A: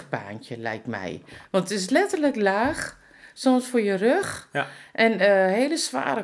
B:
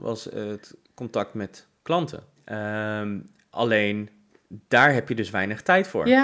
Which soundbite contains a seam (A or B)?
B